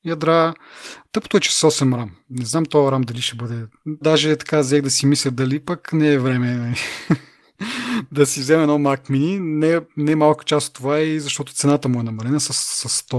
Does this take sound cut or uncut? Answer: cut